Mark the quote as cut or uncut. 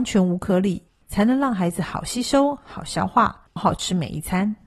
cut